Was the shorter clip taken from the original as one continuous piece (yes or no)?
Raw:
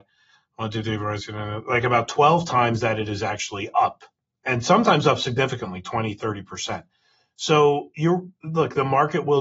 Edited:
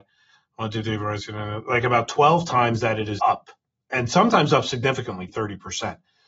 no